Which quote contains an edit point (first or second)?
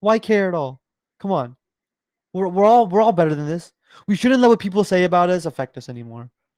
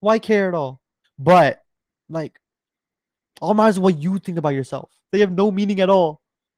second